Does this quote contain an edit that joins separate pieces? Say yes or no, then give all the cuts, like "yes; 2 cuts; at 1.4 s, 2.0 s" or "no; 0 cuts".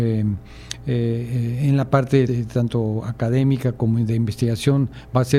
yes; 1 cut; at 2.3 s